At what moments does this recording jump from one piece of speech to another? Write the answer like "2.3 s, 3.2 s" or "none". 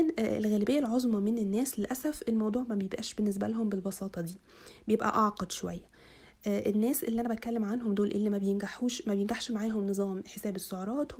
none